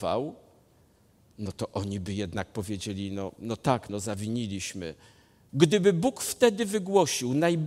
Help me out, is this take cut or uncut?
cut